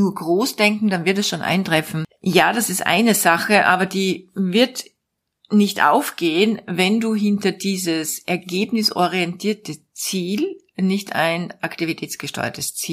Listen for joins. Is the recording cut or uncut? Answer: uncut